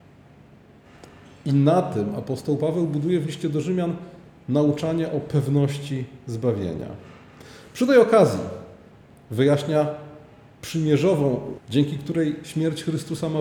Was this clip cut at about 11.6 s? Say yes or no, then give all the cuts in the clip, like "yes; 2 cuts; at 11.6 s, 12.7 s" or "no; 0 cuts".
yes; 1 cut; at 11.6 s